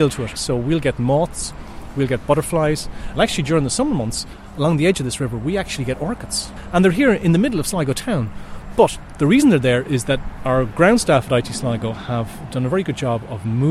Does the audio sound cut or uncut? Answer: uncut